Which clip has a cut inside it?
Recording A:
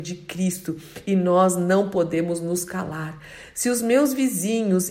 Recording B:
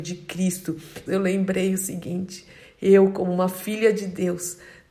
B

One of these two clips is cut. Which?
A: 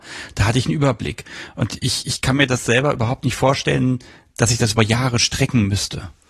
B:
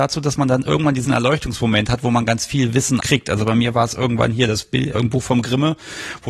B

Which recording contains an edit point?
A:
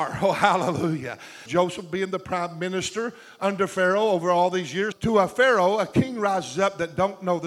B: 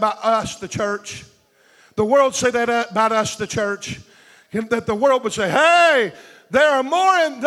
A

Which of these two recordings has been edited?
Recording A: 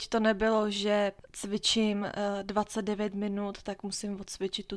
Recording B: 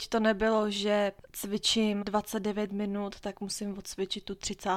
B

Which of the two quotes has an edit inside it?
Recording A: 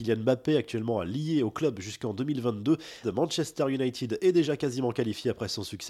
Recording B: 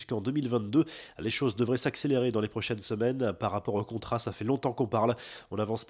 A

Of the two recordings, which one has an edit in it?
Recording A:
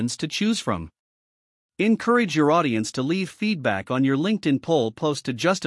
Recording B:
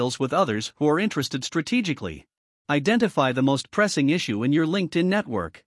B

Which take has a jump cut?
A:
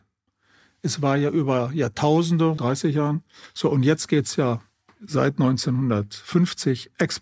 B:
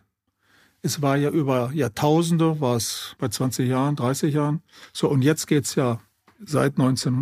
A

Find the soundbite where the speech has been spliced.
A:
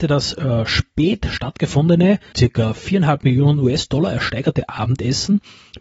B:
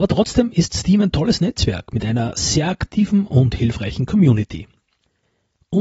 A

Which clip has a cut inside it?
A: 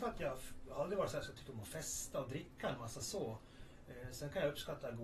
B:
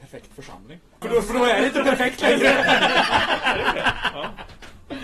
B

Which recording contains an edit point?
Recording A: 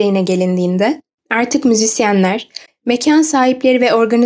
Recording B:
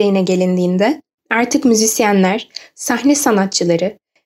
A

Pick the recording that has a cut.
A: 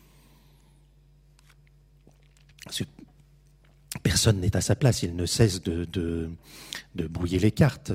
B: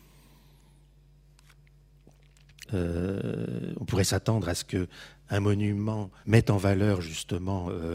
B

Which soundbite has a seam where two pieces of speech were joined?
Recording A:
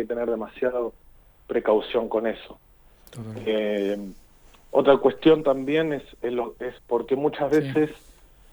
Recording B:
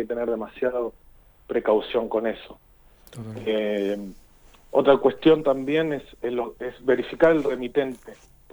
A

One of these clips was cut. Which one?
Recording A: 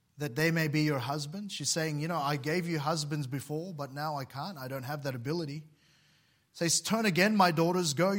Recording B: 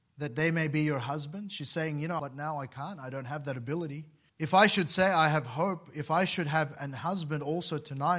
B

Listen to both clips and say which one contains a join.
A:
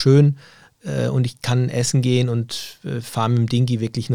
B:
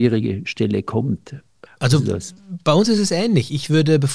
B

